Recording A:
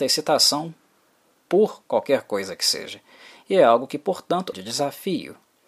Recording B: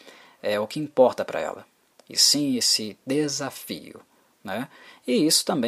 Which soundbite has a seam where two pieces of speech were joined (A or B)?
A